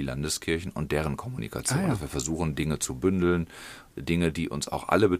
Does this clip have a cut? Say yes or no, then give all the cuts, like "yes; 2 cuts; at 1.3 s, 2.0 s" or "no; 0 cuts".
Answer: no; 0 cuts